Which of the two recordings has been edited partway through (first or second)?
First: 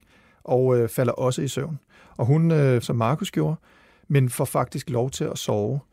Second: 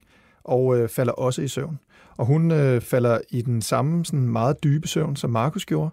first